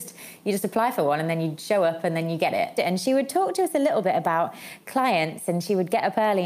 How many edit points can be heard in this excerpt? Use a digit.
1